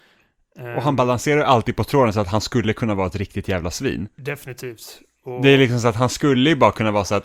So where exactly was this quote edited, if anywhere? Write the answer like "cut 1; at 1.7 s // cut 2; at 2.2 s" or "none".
none

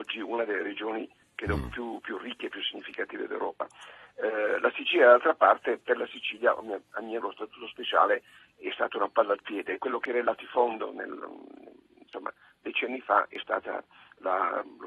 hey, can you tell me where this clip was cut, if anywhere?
cut 1; at 7.2 s

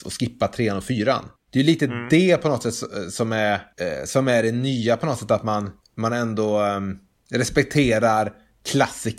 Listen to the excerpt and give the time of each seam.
none

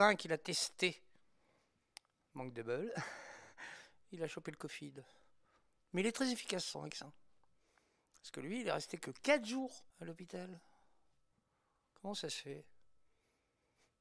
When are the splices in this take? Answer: cut 1; at 9.9 s

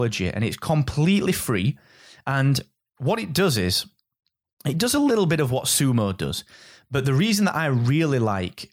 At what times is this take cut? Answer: none

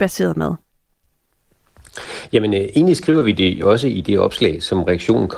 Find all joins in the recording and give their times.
none

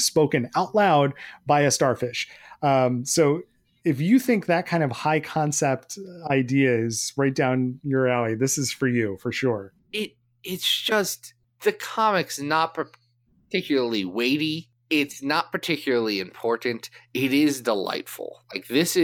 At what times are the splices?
none

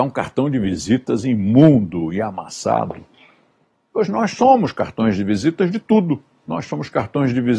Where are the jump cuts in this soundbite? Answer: none

